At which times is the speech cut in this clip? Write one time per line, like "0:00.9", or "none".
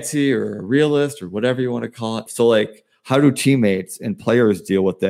0:02.3